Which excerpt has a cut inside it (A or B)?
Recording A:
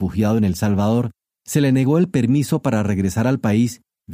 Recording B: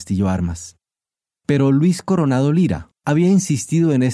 B